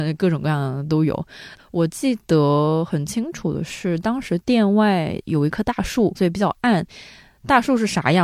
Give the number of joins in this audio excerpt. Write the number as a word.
two